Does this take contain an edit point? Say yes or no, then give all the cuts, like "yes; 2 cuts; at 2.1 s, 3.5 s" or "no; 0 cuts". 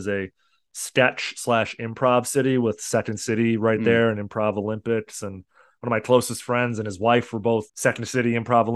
yes; 1 cut; at 7.7 s